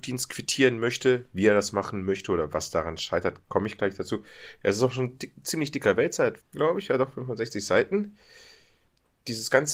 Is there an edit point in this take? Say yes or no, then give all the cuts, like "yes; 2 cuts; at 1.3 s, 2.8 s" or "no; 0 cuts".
yes; 2 cuts; at 4.6 s, 6.4 s